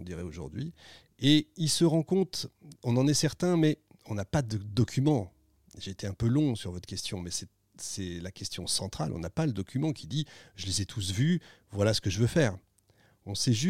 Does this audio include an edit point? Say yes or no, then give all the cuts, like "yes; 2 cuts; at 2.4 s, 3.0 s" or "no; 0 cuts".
no; 0 cuts